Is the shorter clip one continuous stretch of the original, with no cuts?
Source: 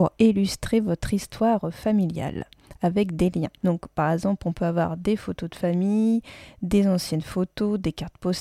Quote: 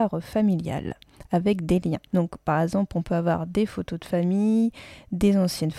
yes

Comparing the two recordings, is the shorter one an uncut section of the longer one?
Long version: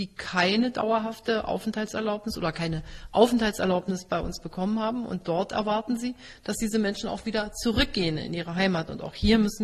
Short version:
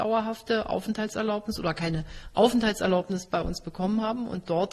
yes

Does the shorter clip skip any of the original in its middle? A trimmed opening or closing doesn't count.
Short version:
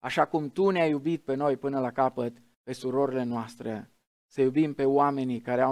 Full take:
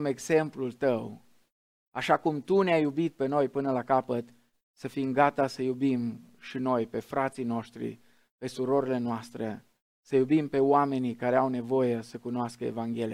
yes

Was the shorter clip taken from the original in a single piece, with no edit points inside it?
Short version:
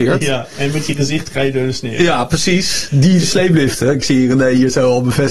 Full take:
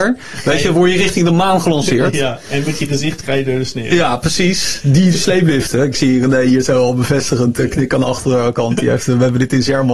yes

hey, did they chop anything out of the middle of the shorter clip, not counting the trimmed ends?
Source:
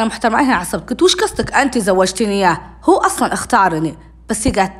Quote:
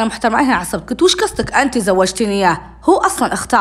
no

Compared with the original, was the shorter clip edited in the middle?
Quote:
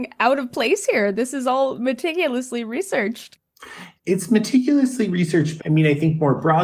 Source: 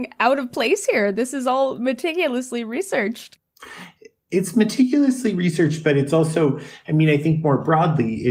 yes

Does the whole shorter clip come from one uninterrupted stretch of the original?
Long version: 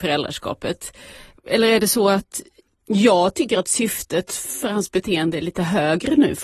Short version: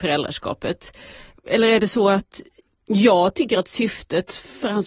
yes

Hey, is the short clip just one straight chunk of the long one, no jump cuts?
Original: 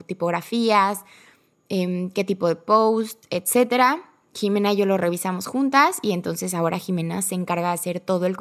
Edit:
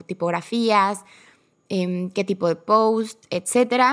yes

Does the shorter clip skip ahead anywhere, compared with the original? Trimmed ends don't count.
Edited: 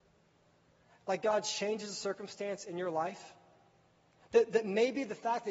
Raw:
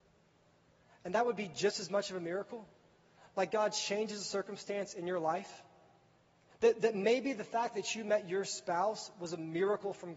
yes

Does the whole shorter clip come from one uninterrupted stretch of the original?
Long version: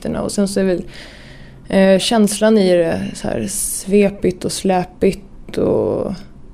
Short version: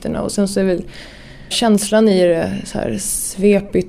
no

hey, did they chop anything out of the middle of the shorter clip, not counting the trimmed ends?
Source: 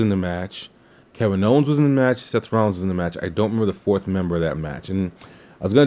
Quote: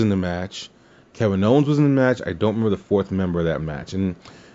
yes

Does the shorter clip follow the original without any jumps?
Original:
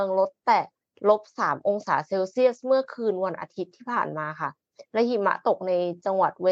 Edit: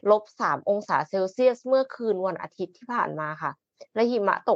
yes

